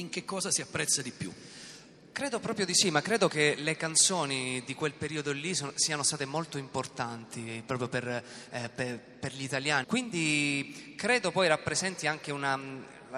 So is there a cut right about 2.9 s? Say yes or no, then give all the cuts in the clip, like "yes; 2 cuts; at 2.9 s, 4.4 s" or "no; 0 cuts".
no; 1 cut; at 9.8 s